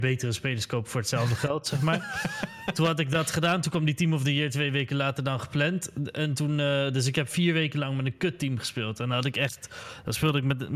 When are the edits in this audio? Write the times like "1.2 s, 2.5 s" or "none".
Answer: none